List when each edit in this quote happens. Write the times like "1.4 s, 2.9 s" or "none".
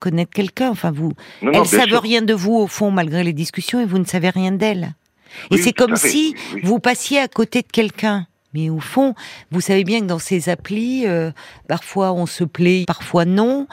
11.6 s, 12.8 s